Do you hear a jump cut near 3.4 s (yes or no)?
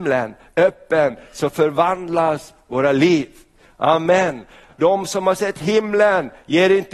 no